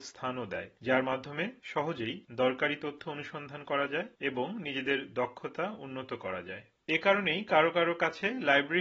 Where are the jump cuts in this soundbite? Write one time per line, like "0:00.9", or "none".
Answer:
none